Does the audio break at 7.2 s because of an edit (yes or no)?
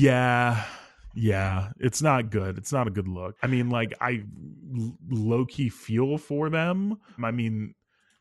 yes